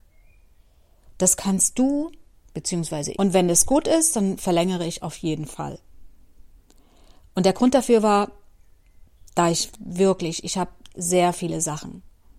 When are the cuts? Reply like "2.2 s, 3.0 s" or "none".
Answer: 3.1 s